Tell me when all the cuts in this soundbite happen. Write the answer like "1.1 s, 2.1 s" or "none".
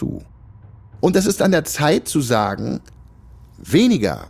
none